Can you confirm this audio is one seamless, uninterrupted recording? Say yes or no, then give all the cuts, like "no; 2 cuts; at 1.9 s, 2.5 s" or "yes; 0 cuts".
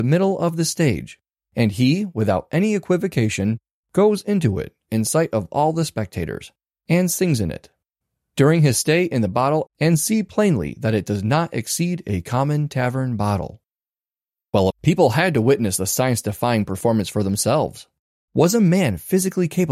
no; 2 cuts; at 9.7 s, 14.7 s